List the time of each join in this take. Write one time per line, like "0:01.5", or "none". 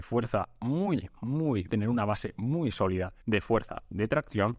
0:01.7
0:03.2